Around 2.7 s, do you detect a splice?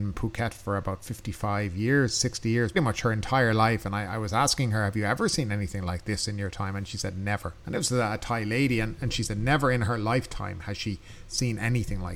yes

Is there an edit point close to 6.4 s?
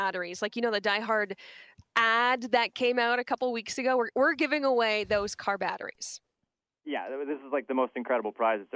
no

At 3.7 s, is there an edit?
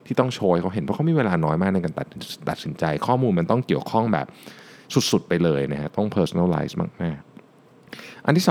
no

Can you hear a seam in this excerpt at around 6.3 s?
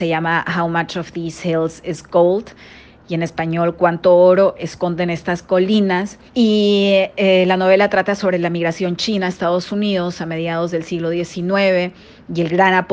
yes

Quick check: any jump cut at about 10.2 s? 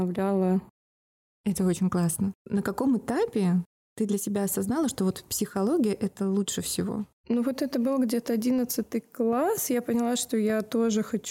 no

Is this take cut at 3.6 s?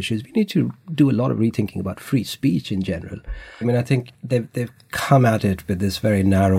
yes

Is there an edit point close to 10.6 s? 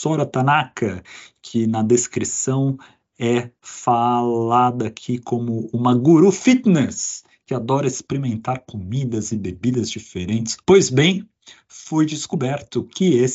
yes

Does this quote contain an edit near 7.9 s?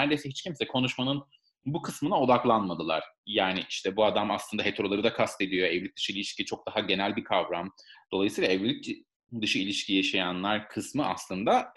yes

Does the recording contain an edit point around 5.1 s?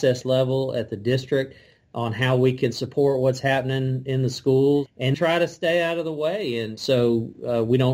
yes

